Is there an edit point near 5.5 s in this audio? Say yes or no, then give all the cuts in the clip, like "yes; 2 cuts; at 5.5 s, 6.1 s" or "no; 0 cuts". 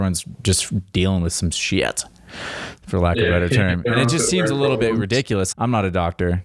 yes; 1 cut; at 5.5 s